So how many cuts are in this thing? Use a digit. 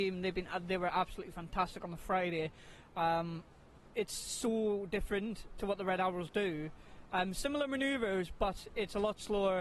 0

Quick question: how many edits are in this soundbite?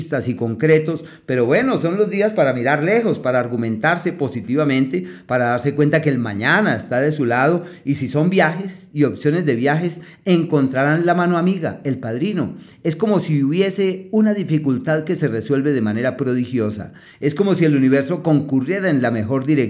0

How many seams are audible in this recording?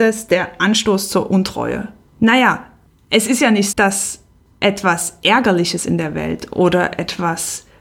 2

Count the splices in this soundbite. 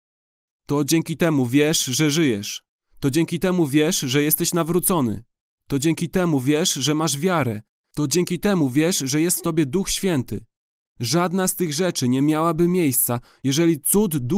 0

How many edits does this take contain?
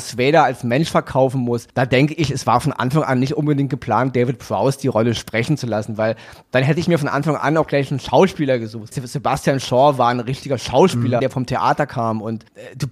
2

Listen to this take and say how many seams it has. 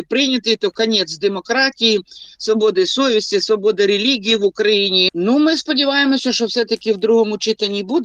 1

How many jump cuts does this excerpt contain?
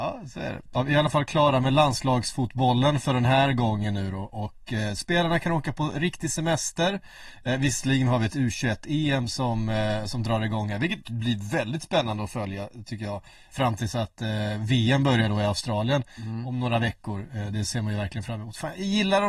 1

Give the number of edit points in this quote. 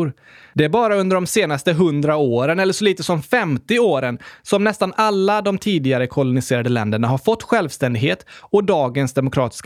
0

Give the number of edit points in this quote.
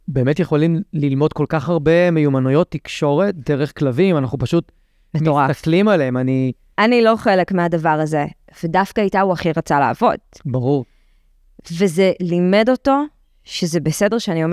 1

